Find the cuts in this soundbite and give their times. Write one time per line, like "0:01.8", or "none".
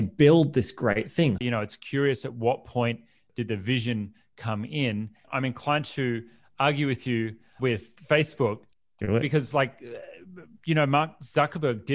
0:01.4
0:05.2